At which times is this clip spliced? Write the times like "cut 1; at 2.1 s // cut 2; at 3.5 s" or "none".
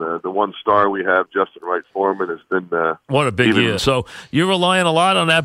cut 1; at 3.8 s